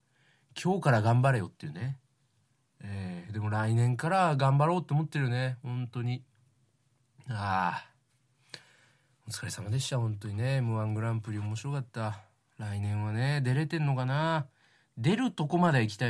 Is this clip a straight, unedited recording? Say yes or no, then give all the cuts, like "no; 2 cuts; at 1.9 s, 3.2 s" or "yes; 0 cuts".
yes; 0 cuts